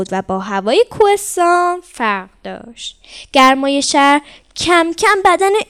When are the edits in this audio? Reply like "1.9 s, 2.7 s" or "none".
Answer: none